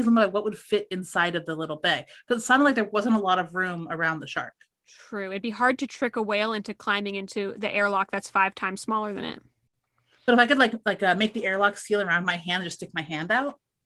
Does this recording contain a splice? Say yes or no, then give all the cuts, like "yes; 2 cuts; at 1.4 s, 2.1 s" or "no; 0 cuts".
no; 0 cuts